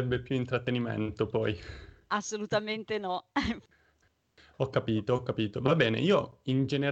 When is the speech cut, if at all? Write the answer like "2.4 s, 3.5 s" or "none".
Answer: none